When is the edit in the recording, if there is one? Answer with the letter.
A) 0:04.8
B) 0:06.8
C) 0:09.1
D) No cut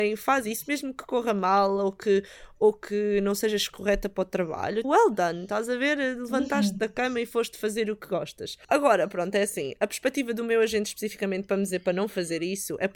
A